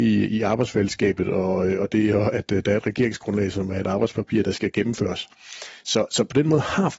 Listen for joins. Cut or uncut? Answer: uncut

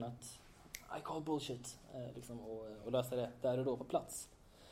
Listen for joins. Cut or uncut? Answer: uncut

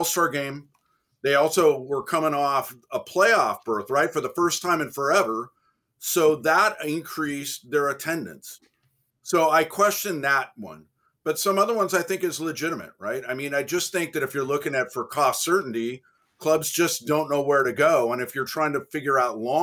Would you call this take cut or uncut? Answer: uncut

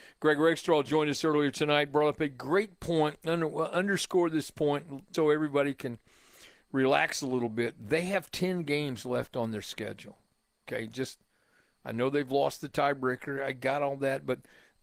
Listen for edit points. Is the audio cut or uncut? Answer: cut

